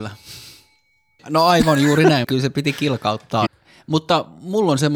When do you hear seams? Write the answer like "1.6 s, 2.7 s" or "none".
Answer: 1.2 s, 2.2 s, 3.5 s